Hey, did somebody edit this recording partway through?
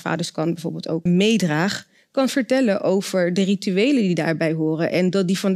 yes; 1 cut; at 1.1 s

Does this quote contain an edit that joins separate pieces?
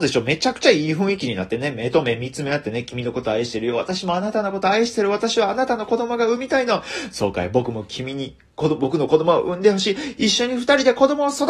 no; 0 cuts

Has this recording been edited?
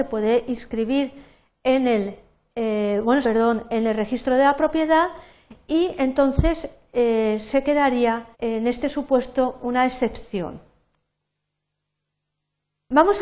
yes; 2 cuts; at 3.2 s, 8.3 s

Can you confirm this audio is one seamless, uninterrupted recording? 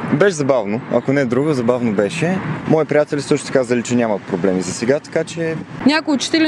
no; 1 cut; at 2.7 s

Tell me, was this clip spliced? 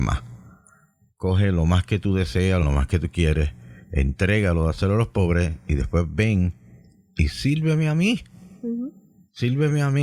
yes; 1 cut; at 2.6 s

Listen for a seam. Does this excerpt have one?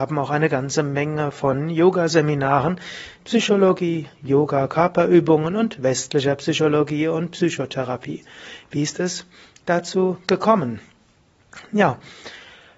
yes; 1 cut; at 3.2 s

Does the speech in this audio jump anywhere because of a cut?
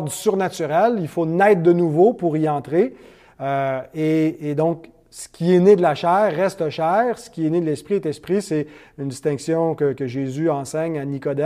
no; 0 cuts

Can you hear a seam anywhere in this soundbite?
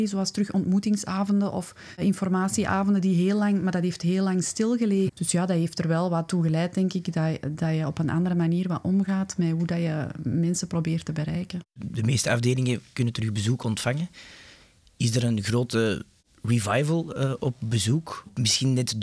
yes; 1 cut; at 5.1 s

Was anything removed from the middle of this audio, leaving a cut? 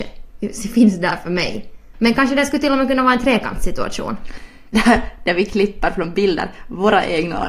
yes; 2 cuts; at 1.9 s, 4.7 s

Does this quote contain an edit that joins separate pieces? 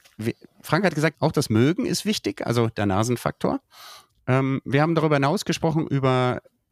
yes; 1 cut; at 1.1 s

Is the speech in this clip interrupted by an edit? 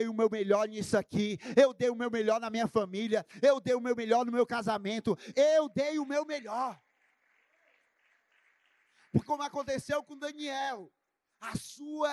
yes; 2 cuts; at 5.3 s, 9.2 s

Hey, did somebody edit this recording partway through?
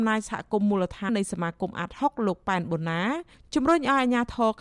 yes; 1 cut; at 1.1 s

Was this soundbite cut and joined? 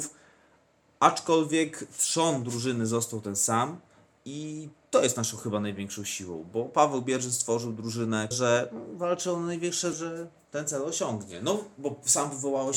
yes; 2 cuts; at 8.3 s, 9.9 s

